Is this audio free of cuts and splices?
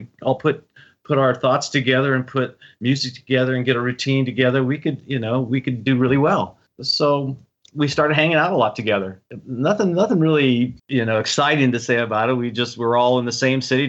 no; 1 cut; at 10.8 s

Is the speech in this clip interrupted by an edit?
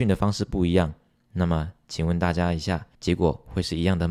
yes; 1 cut; at 3.0 s

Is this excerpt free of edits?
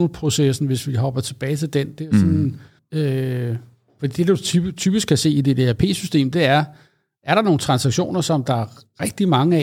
no; 1 cut; at 2.8 s

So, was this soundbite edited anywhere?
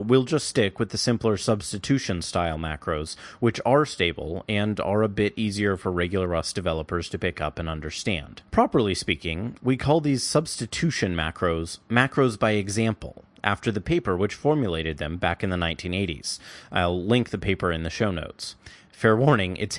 yes; 1 cut; at 8.5 s

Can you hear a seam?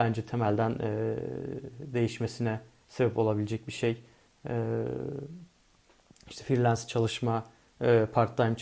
no; 0 cuts

